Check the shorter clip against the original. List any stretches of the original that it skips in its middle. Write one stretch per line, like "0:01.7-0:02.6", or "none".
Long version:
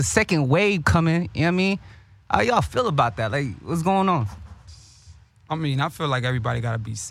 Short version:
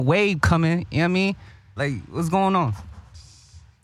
0:02.2-0:03.3